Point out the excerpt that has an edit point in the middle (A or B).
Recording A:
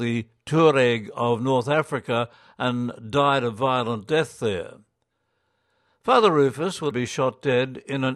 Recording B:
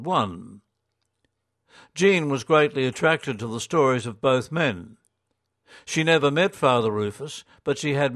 A